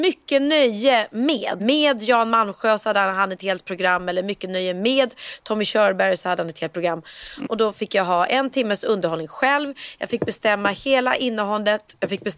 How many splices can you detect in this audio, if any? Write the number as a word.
two